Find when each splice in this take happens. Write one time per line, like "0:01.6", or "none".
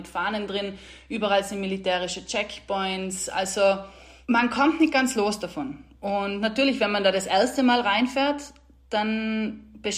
none